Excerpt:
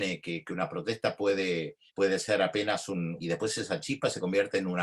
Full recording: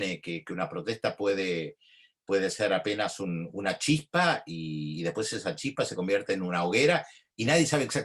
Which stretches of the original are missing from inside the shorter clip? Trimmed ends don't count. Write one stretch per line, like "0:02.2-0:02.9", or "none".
0:01.9-0:02.2
0:03.5-0:05.0